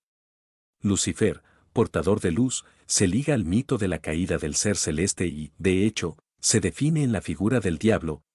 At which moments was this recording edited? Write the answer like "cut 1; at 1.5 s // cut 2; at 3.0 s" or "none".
none

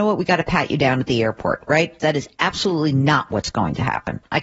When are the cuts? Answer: cut 1; at 2.0 s

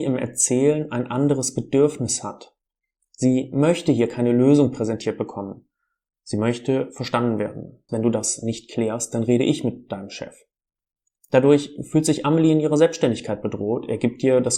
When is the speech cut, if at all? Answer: cut 1; at 7.9 s

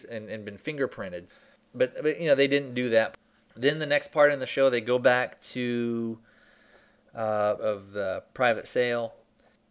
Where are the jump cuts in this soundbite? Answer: cut 1; at 7.6 s

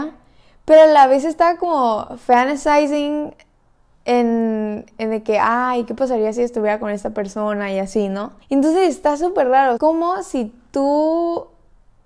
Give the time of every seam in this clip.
cut 1; at 8.4 s // cut 2; at 9.8 s

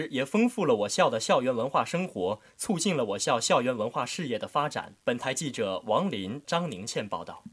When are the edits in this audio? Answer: cut 1; at 5.0 s // cut 2; at 6.4 s

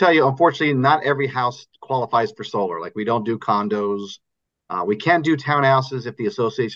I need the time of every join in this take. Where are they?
none

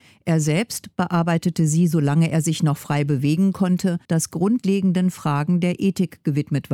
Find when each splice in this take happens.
cut 1; at 4.1 s

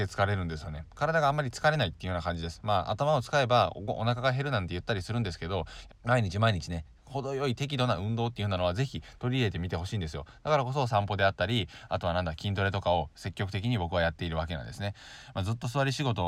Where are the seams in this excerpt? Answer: cut 1; at 5.9 s

